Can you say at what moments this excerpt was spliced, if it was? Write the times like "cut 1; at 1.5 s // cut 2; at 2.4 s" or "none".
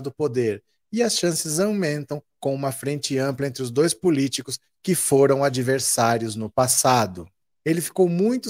cut 1; at 7.5 s